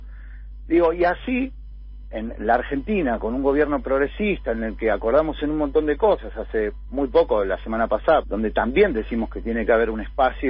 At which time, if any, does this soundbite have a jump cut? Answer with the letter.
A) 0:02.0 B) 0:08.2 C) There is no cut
B